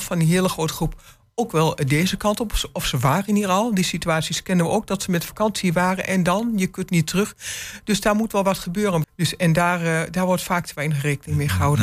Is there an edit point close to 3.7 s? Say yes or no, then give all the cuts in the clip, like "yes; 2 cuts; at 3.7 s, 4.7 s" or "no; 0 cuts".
no; 1 cut; at 9.0 s